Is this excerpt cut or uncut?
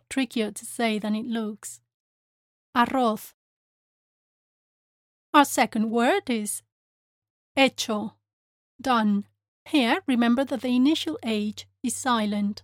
cut